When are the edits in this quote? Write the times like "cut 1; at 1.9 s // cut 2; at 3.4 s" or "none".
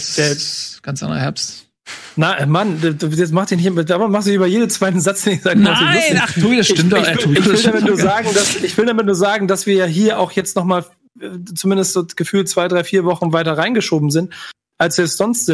cut 1; at 7.3 s